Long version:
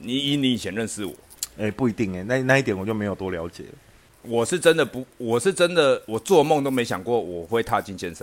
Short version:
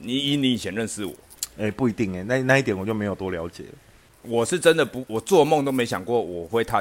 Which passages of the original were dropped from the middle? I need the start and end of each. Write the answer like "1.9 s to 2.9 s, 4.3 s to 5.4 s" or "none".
5.1 s to 6.1 s